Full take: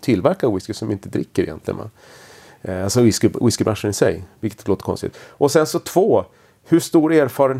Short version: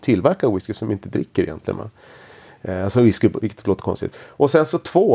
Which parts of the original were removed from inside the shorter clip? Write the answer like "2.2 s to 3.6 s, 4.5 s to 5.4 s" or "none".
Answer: 3.4 s to 4.4 s